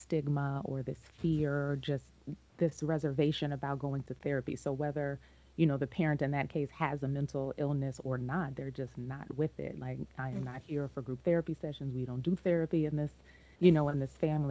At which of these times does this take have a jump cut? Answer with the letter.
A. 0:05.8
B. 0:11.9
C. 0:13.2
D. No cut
D